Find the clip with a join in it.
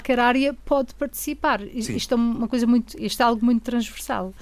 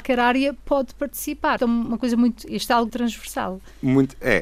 second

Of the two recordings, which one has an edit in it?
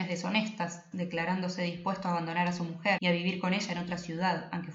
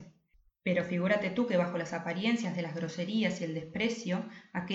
first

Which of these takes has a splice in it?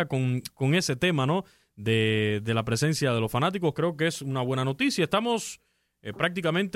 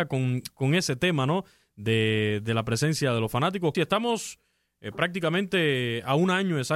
second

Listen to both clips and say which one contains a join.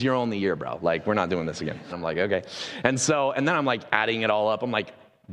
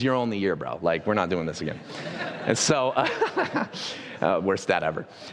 first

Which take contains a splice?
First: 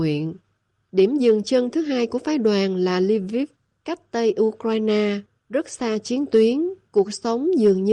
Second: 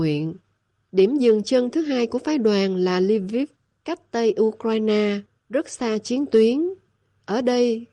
first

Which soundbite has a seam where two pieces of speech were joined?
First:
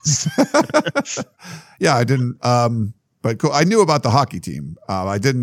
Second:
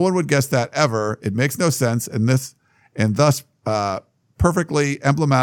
first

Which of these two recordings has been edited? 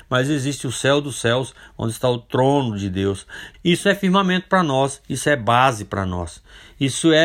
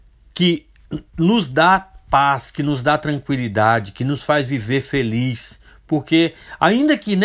first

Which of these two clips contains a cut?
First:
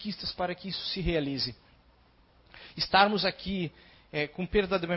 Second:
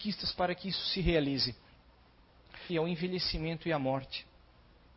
second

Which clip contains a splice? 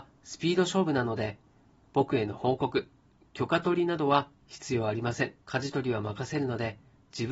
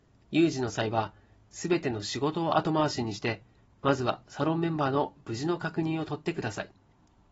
first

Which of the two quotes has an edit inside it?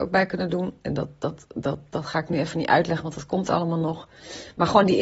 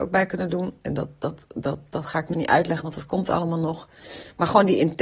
second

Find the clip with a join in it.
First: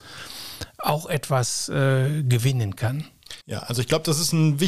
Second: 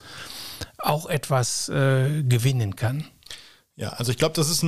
first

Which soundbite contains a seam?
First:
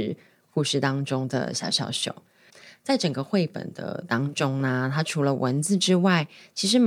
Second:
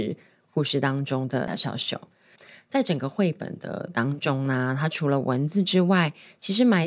second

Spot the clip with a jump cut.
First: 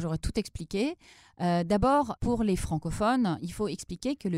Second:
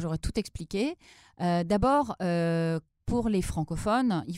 first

